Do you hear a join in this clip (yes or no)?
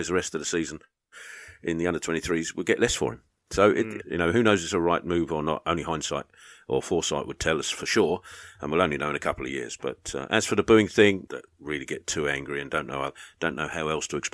yes